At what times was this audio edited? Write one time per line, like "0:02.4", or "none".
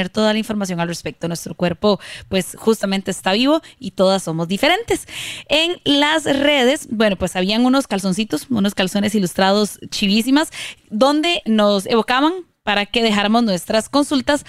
none